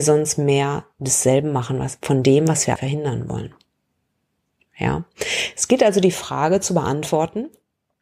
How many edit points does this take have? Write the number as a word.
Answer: one